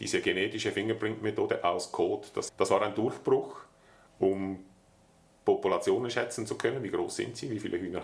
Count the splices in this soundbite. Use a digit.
1